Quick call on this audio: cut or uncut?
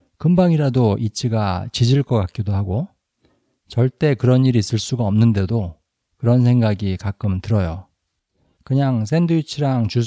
cut